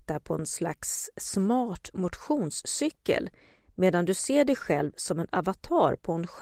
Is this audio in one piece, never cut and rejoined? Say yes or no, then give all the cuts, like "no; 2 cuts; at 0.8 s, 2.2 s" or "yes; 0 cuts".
yes; 0 cuts